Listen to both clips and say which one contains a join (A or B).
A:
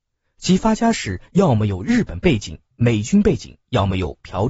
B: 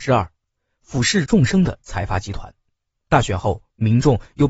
B